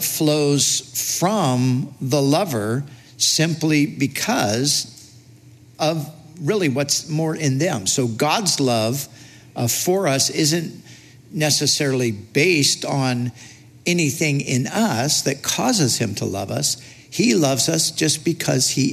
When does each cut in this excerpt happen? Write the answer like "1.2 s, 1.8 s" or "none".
none